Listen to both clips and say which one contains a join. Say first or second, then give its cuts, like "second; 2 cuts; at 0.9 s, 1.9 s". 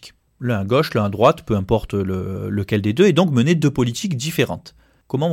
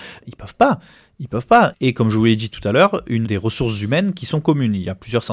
second; 2 cuts; at 1.7 s, 3.2 s